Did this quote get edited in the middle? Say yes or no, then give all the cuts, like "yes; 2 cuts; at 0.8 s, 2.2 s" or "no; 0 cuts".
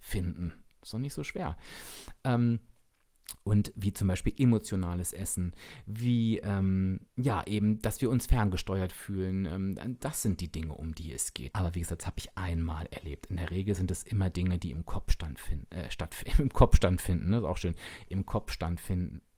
yes; 2 cuts; at 7.1 s, 11.5 s